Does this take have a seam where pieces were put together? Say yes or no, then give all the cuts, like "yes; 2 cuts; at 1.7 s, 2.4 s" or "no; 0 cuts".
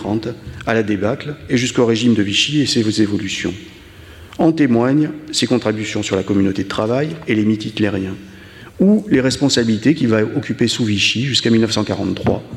no; 0 cuts